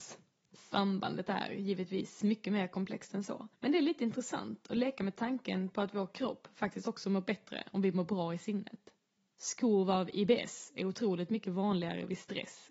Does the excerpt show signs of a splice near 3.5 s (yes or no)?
yes